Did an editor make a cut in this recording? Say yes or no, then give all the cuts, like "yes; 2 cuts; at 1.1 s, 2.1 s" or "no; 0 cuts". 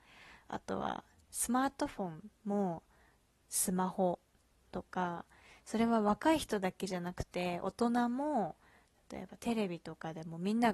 yes; 1 cut; at 2.4 s